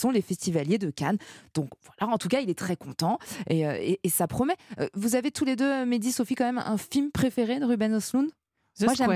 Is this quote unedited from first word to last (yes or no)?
yes